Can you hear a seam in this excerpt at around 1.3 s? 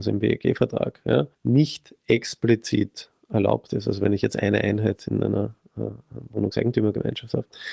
yes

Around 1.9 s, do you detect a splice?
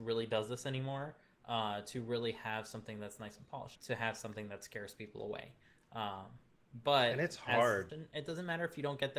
no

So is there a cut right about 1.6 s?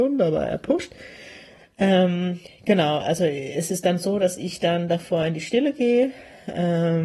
yes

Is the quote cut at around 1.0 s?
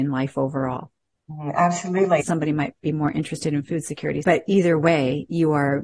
no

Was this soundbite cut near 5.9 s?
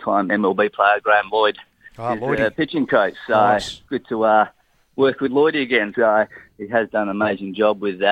yes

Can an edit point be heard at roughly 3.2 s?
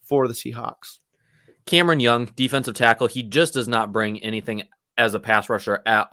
no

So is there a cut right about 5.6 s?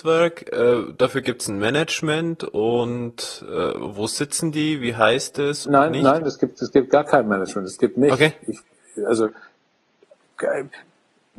yes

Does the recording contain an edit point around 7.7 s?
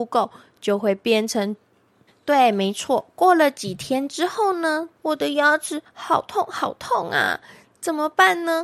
no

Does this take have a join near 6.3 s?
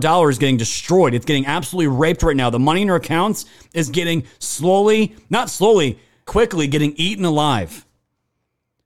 yes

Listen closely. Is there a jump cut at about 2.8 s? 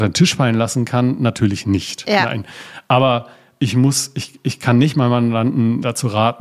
no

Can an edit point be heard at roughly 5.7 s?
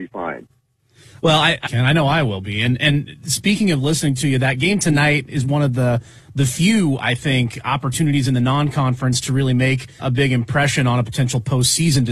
no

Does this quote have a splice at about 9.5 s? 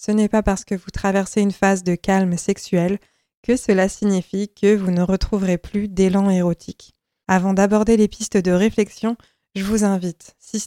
no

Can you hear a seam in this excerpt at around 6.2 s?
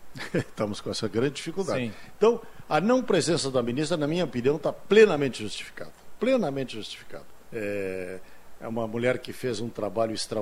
no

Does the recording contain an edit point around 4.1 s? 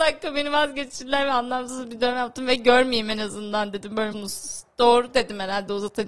yes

